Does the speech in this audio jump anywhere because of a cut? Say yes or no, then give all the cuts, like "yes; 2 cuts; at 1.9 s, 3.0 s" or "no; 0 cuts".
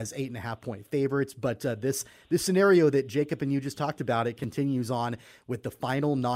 no; 0 cuts